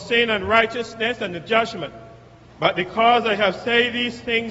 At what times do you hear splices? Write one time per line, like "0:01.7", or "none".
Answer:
0:02.5